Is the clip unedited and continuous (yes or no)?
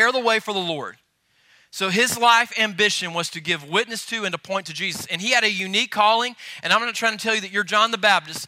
yes